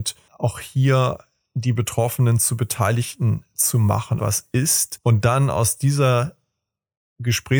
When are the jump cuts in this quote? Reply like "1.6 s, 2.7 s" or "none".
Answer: 4.2 s

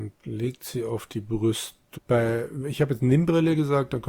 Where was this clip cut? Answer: 2.0 s

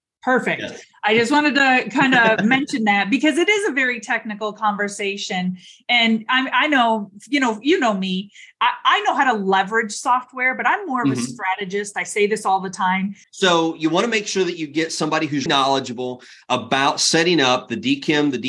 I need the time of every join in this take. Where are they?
13.2 s, 15.5 s

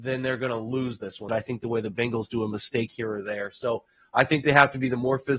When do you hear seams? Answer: 1.3 s

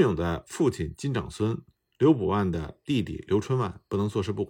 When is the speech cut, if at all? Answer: none

